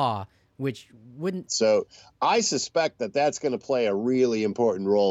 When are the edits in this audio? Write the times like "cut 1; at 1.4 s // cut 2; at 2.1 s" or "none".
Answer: cut 1; at 1.5 s

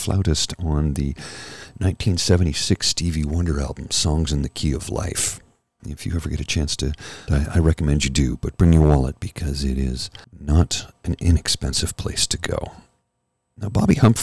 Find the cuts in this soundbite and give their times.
cut 1; at 5.8 s // cut 2; at 7.3 s // cut 3; at 10.2 s

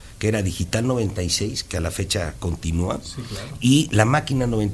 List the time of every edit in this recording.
none

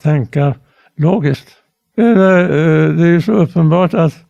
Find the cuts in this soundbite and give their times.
cut 1; at 1.9 s

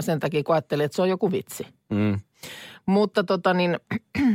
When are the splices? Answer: none

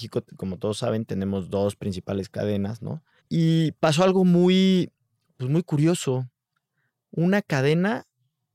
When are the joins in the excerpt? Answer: cut 1; at 3.2 s

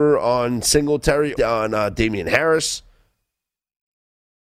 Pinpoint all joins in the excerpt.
cut 1; at 1.4 s

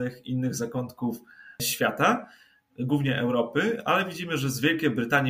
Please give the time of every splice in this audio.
none

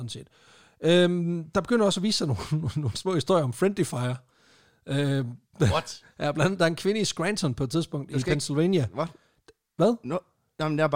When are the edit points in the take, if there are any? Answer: none

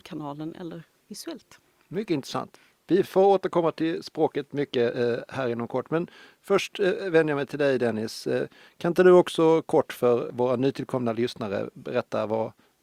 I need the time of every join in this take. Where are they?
none

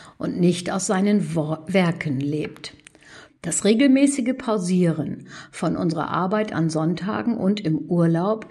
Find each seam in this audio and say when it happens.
cut 1; at 3.3 s

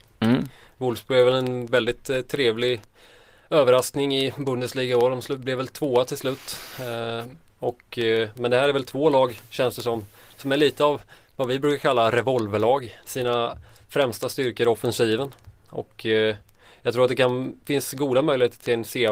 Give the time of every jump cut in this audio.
cut 1; at 13.0 s

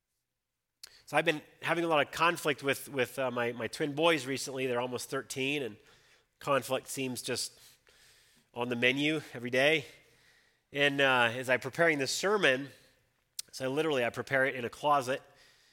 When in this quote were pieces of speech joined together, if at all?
none

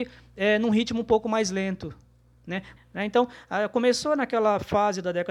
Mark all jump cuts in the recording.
cut 1; at 2.8 s

